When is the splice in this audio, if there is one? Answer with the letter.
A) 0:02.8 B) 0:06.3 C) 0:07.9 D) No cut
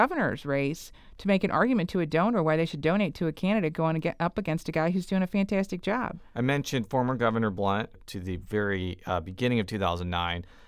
C